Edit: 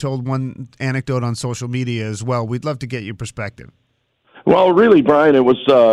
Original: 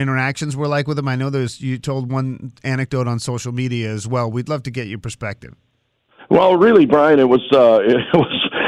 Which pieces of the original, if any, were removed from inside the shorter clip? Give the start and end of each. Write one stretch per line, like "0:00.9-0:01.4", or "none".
none